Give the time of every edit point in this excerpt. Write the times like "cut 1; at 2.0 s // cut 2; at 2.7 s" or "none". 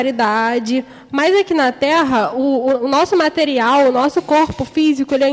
none